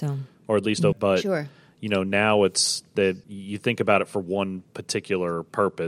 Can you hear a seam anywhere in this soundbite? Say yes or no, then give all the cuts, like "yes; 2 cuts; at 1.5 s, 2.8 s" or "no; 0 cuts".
yes; 2 cuts; at 0.9 s, 3.2 s